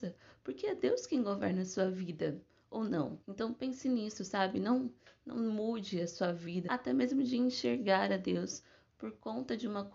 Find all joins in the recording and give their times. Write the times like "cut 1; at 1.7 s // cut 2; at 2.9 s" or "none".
cut 1; at 3.2 s // cut 2; at 6.7 s